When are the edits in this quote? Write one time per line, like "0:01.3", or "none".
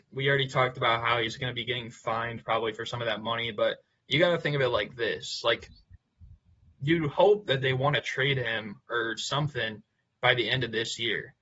none